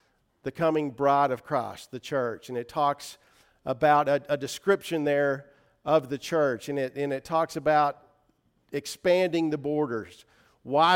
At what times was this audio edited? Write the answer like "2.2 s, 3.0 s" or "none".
none